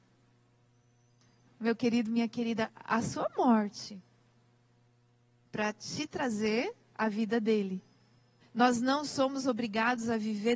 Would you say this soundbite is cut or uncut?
cut